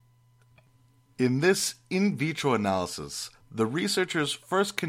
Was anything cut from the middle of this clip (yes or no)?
no